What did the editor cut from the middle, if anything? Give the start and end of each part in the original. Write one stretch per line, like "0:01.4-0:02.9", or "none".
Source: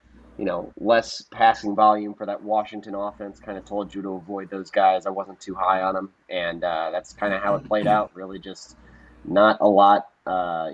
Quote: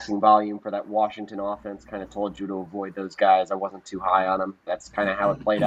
0:06.2-0:06.9